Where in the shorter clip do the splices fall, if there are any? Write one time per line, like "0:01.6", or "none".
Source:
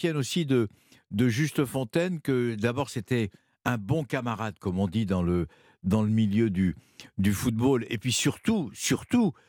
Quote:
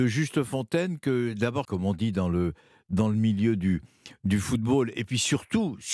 0:01.6